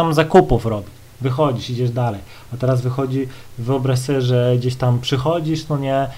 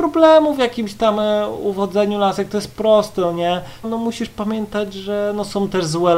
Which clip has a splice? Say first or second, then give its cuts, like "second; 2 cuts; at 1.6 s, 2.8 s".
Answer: second; 1 cut; at 3.8 s